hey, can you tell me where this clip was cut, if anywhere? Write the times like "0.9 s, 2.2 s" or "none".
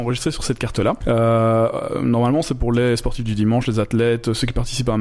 1.0 s